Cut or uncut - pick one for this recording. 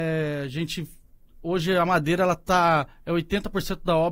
uncut